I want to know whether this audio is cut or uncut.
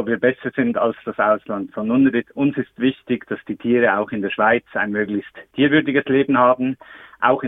uncut